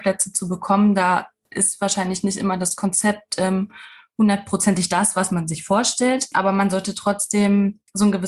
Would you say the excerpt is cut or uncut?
uncut